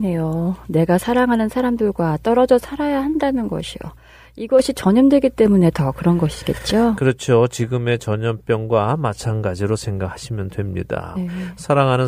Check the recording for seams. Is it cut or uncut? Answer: cut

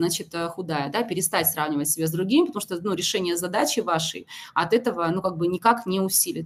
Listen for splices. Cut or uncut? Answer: uncut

